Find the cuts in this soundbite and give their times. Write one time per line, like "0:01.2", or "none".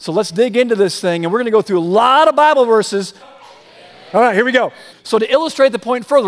0:03.2
0:04.9